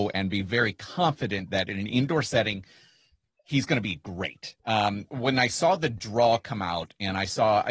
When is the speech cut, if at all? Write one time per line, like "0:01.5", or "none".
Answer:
0:04.6